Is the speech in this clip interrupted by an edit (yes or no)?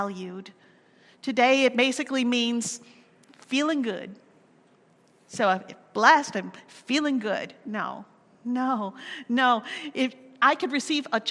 no